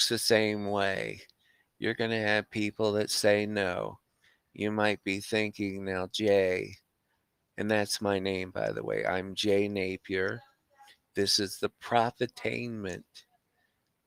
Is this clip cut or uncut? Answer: uncut